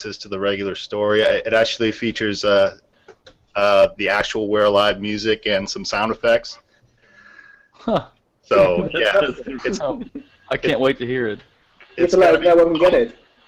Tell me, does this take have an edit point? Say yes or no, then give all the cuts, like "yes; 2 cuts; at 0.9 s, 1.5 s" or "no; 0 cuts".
yes; 1 cut; at 9.6 s